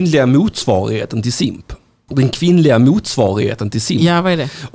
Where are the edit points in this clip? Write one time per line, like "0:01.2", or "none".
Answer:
0:02.1